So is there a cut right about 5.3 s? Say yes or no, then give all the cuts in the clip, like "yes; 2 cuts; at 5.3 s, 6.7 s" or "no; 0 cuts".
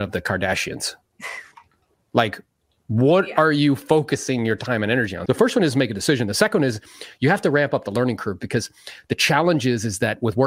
yes; 1 cut; at 5.3 s